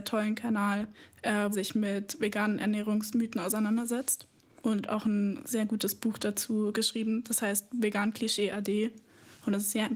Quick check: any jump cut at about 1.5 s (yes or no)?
yes